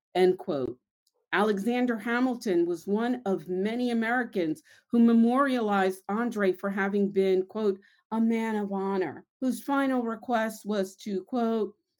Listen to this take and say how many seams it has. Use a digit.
1